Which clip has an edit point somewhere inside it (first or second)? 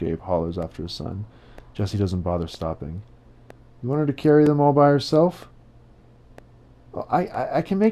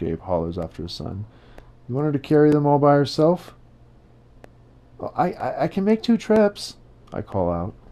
second